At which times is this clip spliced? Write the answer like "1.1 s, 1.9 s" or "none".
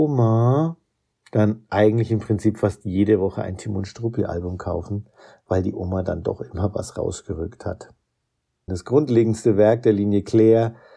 1.7 s, 8.7 s